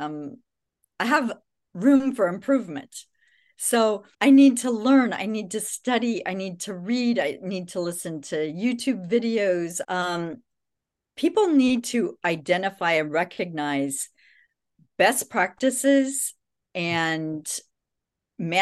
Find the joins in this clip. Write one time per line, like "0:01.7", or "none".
0:04.1
0:09.8